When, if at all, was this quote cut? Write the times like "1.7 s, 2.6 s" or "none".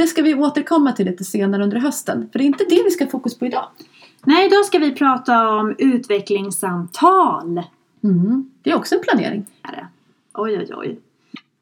9.6 s